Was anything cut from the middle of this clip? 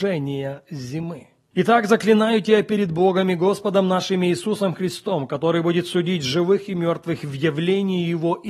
yes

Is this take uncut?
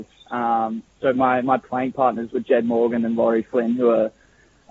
yes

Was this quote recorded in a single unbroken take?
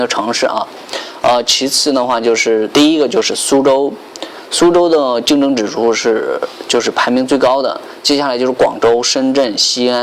yes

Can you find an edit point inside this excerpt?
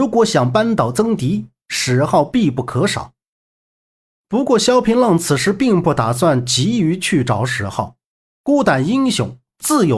no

